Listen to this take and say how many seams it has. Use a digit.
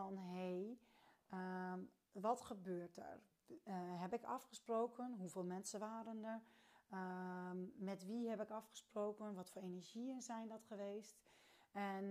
0